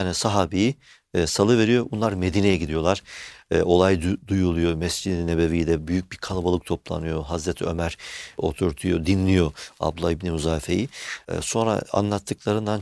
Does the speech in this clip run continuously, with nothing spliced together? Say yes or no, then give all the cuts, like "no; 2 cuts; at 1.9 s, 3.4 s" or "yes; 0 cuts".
yes; 0 cuts